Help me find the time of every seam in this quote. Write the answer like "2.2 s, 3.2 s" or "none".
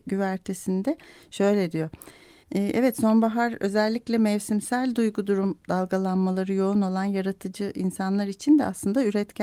2.4 s